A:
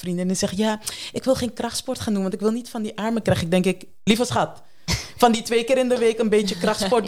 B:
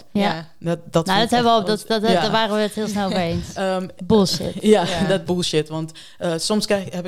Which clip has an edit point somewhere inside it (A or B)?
B